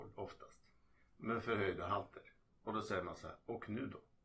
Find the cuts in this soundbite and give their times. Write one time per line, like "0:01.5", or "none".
none